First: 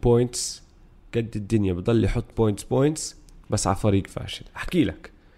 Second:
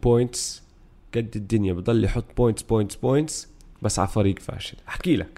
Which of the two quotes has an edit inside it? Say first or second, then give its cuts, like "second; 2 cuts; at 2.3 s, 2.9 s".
first; 1 cut; at 2.3 s